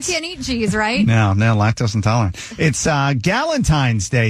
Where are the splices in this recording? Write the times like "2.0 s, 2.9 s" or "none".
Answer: none